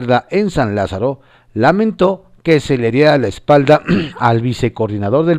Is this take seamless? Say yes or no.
yes